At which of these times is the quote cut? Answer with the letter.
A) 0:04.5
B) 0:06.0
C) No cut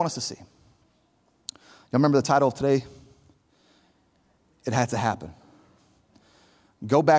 C